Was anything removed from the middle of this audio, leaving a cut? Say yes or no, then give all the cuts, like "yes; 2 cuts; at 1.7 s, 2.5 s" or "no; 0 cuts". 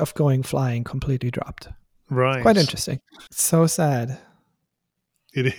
yes; 1 cut; at 3.3 s